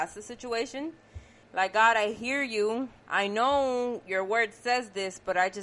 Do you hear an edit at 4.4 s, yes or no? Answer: no